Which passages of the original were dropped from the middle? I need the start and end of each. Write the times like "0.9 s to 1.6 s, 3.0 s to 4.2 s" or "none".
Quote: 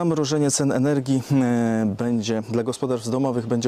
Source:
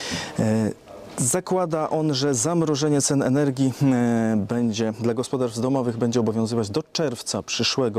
none